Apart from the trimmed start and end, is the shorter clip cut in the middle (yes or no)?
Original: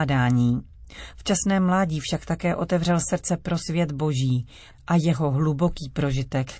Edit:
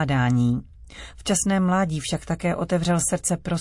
no